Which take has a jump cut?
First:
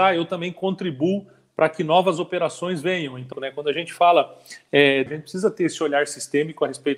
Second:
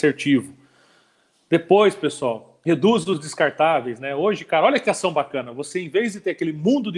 first; 2 cuts; at 3.3 s, 5.1 s

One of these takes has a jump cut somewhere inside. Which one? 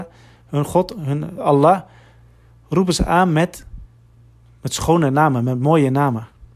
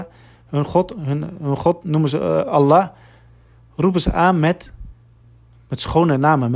first; 1 cut; at 1.4 s

